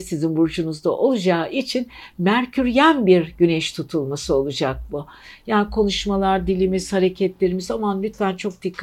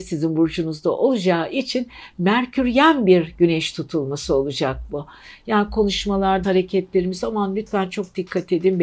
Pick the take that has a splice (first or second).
second